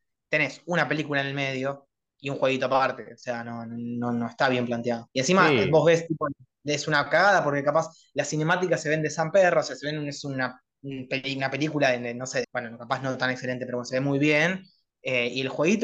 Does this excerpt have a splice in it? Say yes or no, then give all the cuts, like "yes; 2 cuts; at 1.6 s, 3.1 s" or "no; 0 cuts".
yes; 1 cut; at 12.4 s